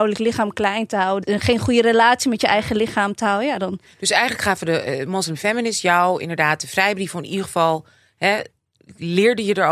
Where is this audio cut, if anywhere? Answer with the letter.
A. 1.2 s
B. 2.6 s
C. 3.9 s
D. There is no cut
A